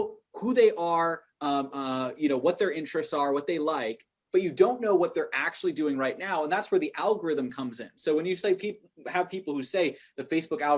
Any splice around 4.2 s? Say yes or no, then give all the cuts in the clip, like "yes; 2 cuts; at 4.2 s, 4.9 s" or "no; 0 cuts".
no; 1 cut; at 1.7 s